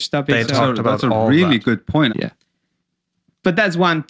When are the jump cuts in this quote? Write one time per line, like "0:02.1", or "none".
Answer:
0:02.1

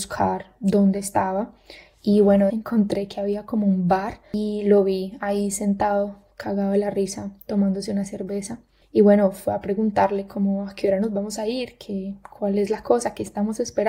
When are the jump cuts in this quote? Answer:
0:02.5

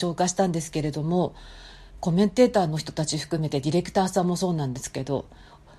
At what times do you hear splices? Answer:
0:01.9

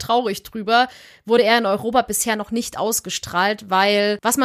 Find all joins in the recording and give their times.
none

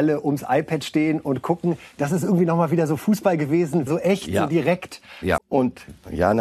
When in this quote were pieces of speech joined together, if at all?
0:03.9
0:05.4

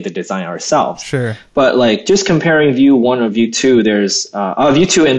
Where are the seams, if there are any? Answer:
none

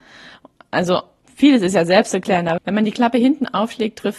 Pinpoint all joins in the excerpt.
0:02.6

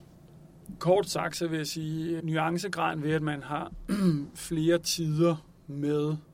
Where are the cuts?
0:02.2

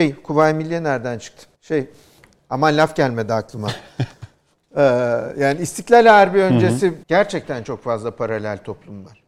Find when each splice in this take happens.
0:01.5
0:07.0

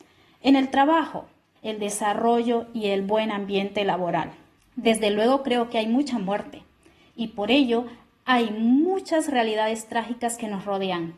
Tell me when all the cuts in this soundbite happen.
0:01.6
0:04.6

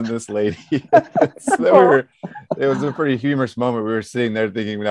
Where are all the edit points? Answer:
0:01.6

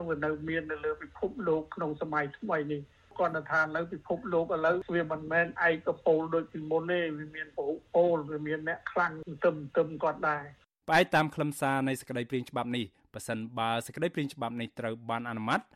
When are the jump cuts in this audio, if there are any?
none

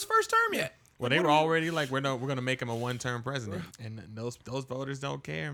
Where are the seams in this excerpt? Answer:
0:03.7

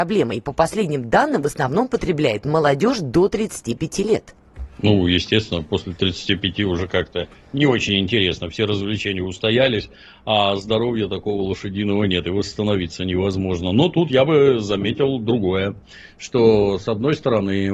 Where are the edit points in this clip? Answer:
none

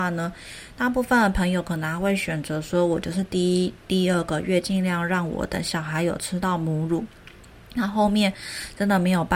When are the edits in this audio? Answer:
none

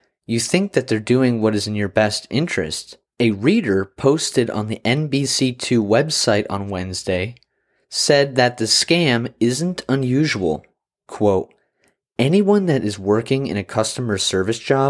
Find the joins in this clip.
0:03.1
0:10.9

